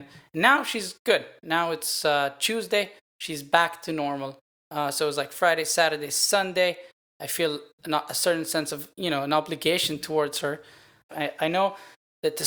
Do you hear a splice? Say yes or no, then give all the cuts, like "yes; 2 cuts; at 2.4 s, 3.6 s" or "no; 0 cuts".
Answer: yes; 2 cuts; at 7.1 s, 11.1 s